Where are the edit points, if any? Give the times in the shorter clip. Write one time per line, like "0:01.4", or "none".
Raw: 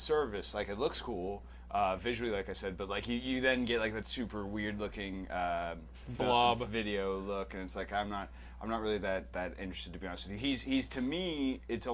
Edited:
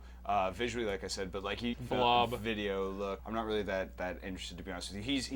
0:01.7
0:03.2